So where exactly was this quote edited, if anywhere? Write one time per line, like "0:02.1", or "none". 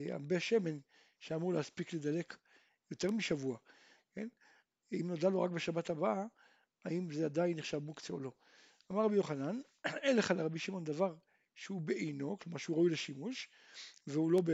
0:04.7